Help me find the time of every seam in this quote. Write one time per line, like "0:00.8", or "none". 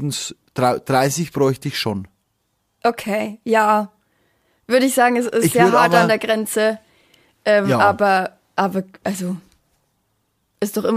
none